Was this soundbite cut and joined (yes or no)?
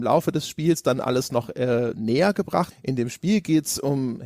yes